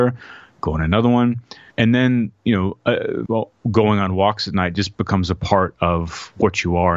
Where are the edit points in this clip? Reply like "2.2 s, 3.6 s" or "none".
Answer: 1.7 s, 3.3 s